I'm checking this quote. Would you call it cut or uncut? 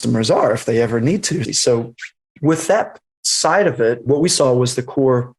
cut